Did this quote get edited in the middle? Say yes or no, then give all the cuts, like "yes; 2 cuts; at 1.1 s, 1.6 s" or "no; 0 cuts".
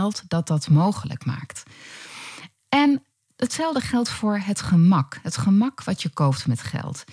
no; 0 cuts